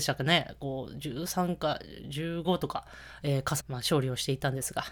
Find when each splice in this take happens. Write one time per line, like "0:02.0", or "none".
0:02.4
0:03.6

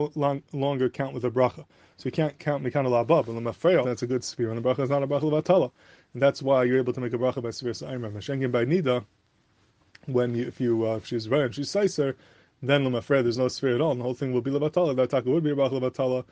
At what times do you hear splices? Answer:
0:03.8

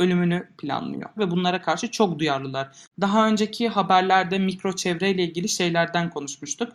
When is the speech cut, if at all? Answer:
0:01.2
0:02.8

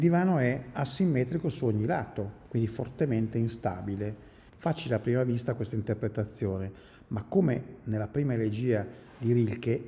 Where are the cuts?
0:02.5
0:04.5

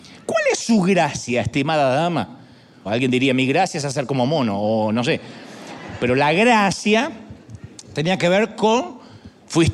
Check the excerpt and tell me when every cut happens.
0:02.9

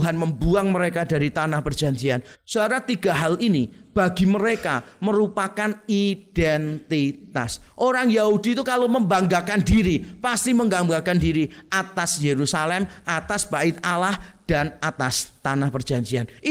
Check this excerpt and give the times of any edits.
0:02.3

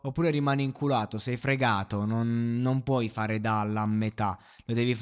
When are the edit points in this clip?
none

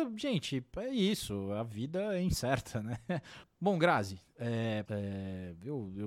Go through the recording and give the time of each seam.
0:03.4
0:04.9

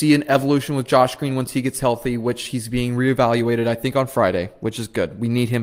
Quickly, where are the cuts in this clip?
none

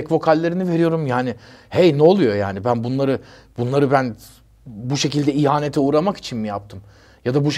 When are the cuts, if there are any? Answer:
none

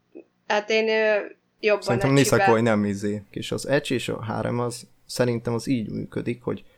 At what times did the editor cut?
0:03.3

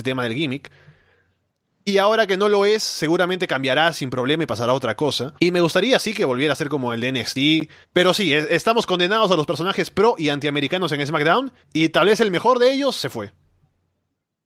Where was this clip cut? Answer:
0:05.4
0:07.8
0:11.6

